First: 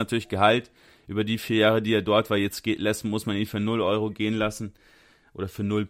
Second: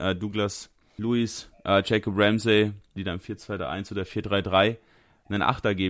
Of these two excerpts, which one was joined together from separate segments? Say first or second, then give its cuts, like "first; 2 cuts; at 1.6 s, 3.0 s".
second; 2 cuts; at 1.0 s, 3.0 s